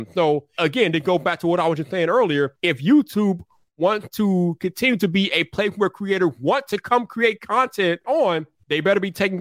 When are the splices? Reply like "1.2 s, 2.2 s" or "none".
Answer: none